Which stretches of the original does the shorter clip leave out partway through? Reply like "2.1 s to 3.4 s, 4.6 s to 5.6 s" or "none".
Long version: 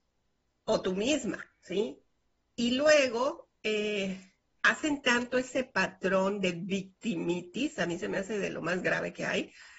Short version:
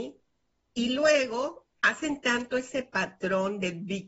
3.6 s to 4.6 s